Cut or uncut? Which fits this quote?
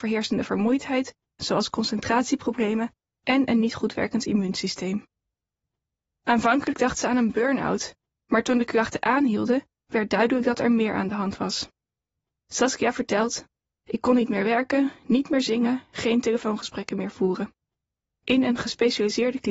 cut